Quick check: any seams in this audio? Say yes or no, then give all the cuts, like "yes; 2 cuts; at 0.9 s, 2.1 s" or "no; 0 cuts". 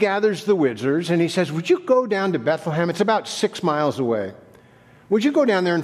no; 0 cuts